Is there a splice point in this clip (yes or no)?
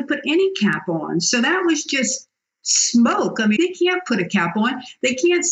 yes